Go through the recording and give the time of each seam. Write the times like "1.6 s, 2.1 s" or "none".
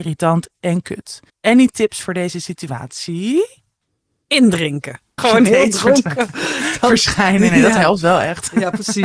1.3 s, 5.2 s

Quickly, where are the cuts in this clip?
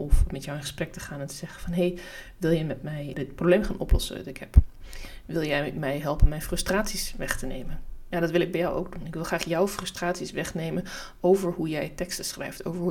3.1 s

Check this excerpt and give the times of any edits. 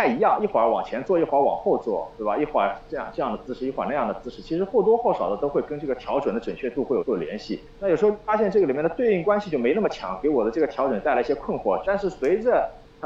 7.0 s, 11.8 s

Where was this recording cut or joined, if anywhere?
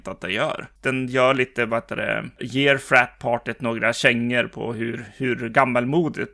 2.4 s

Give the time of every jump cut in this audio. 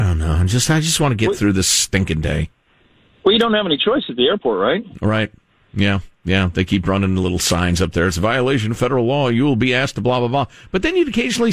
none

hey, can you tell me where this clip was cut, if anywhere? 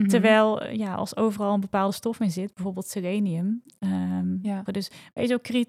4.7 s

